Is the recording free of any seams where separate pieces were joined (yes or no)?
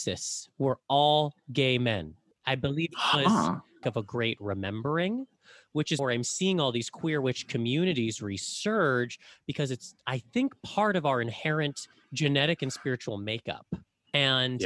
no